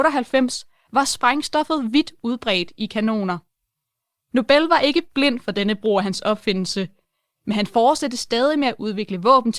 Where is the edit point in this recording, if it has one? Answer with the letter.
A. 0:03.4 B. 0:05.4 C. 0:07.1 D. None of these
D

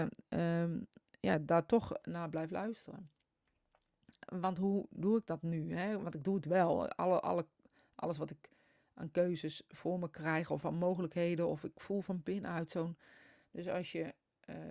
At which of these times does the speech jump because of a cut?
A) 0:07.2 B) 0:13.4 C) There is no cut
B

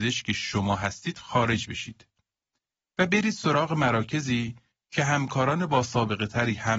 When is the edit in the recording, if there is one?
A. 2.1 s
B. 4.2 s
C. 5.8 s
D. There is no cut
D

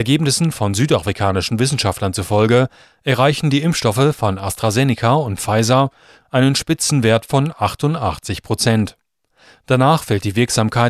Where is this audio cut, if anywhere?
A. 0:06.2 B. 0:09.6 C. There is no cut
A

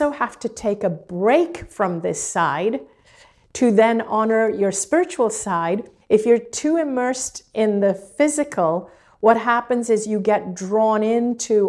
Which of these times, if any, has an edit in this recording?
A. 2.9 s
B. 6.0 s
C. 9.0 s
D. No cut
B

